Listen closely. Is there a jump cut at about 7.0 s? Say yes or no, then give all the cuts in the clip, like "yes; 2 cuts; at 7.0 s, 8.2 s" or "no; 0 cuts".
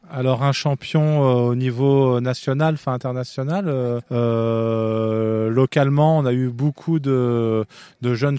no; 1 cut; at 4.0 s